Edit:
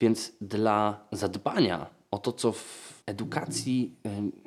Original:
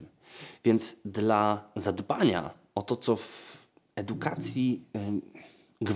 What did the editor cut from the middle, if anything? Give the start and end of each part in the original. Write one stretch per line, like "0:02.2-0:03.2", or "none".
0:03.7-0:03.9